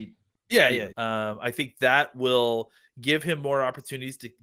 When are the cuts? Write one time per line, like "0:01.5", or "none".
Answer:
0:00.9